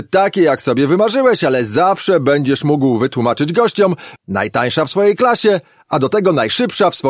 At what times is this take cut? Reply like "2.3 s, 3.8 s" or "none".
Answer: 4.2 s